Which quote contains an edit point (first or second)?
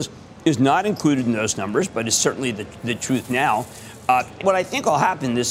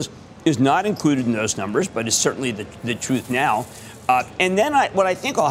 first